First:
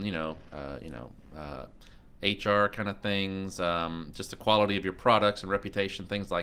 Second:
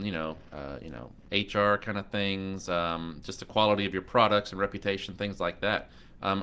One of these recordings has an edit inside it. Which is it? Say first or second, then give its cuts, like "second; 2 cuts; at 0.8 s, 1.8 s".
second; 1 cut; at 1.3 s